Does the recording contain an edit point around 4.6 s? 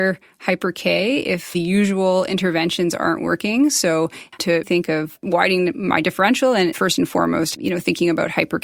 yes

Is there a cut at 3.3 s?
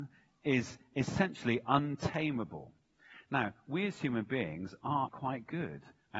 no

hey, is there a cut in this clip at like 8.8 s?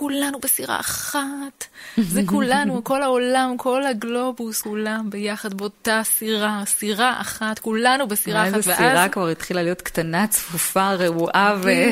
no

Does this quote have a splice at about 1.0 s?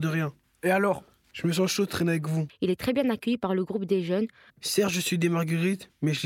no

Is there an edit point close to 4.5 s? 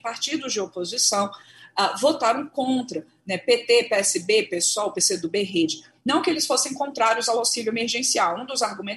yes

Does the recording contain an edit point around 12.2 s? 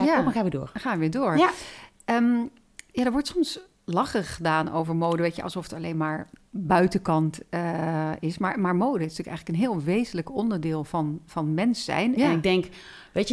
yes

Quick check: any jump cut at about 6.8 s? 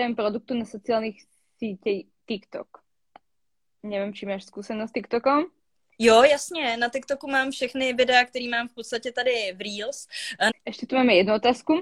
no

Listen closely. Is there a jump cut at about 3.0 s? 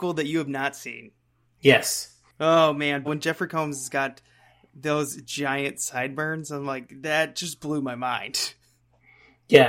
yes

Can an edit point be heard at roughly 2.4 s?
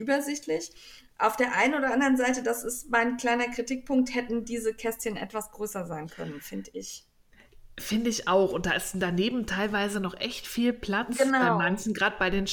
no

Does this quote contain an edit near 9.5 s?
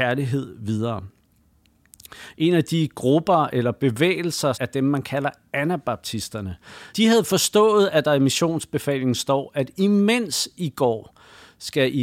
no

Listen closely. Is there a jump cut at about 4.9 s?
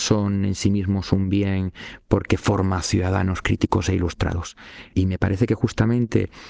yes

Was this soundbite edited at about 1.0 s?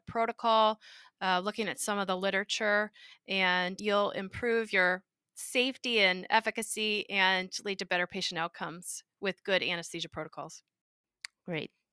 no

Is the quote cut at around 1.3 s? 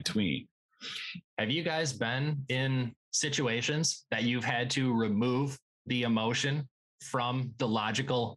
no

